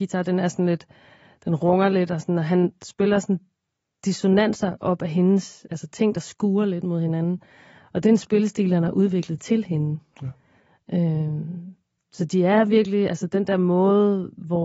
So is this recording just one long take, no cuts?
yes; 0 cuts

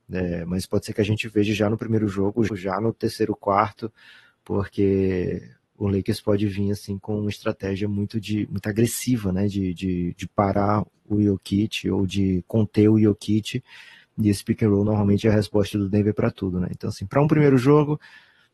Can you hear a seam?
yes; 1 cut; at 2.5 s

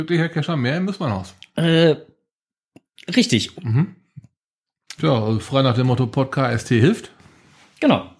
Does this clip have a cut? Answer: yes; 2 cuts; at 3.5 s, 5.0 s

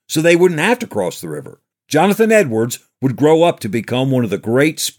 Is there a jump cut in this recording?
yes; 1 cut; at 1.7 s

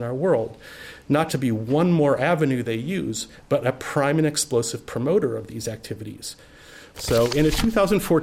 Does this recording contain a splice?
yes; 2 cuts; at 1.3 s, 6.9 s

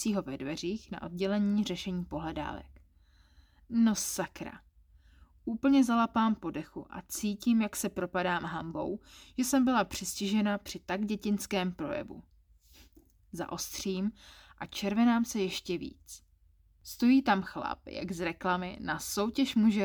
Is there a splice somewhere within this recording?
no; 0 cuts

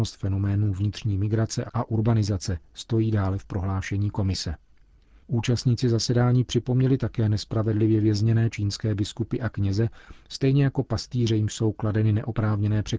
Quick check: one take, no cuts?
yes; 0 cuts

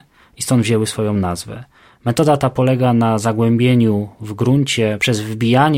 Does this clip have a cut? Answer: no; 0 cuts

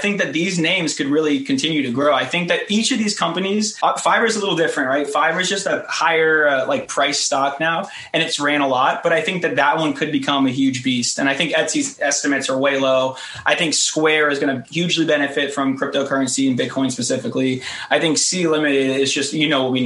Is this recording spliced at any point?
no; 0 cuts

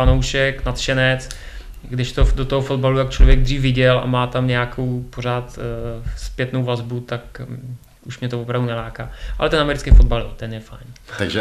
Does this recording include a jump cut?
no; 0 cuts

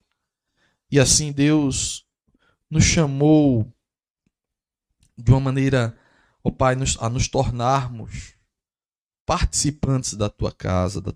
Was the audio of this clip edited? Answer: no; 0 cuts

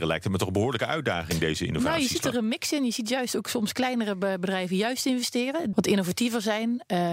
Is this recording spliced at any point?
yes; 1 cut; at 5.7 s

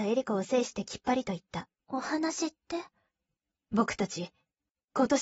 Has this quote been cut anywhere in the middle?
yes; 1 cut; at 1.8 s

